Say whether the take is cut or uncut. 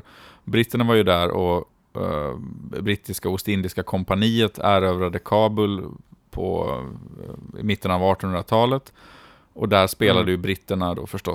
uncut